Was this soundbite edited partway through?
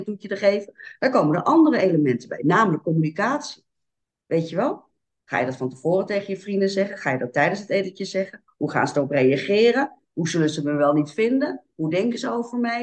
no; 0 cuts

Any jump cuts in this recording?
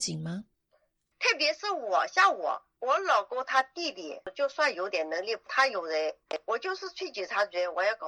yes; 1 cut; at 1.1 s

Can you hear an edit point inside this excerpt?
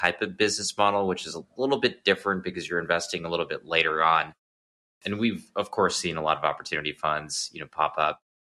yes; 1 cut; at 5.0 s

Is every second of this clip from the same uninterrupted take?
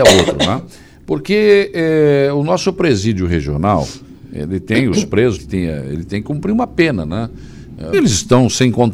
no; 2 cuts; at 5.4 s, 7.9 s

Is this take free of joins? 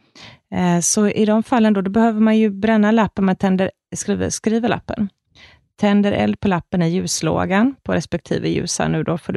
yes; 0 cuts

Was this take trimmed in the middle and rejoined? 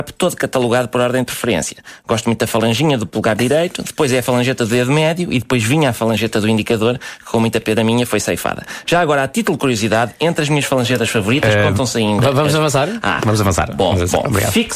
no; 0 cuts

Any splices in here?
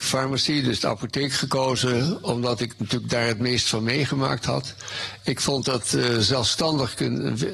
no; 0 cuts

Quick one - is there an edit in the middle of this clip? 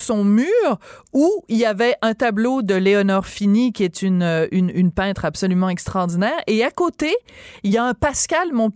no; 0 cuts

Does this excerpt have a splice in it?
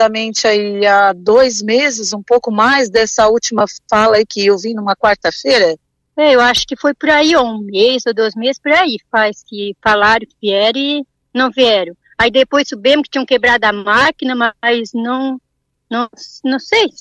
no; 0 cuts

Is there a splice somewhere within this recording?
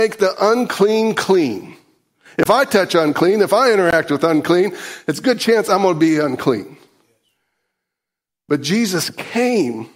no; 0 cuts

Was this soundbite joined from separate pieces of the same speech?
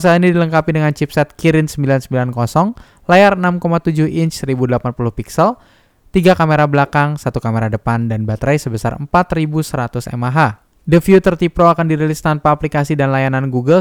no; 0 cuts

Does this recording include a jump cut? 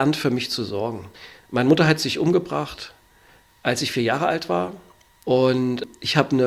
no; 0 cuts

